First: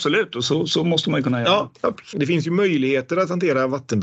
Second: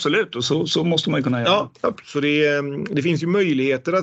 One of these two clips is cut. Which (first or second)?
first